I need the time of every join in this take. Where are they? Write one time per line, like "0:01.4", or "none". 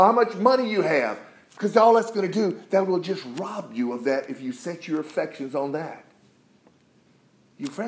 none